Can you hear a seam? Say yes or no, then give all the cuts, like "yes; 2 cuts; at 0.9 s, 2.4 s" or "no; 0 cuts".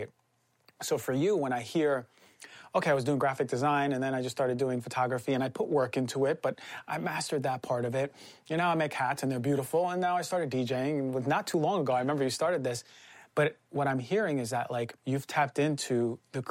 yes; 1 cut; at 15.0 s